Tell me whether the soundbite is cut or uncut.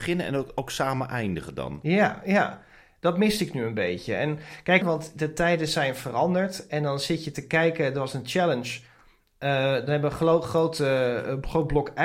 cut